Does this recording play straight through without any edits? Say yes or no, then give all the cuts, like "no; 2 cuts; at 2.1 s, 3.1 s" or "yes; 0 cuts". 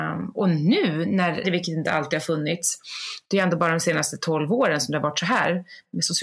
no; 1 cut; at 1.4 s